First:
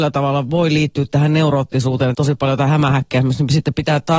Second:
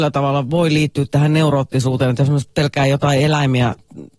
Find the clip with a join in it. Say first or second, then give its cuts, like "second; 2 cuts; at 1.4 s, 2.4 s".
first; 1 cut; at 2.1 s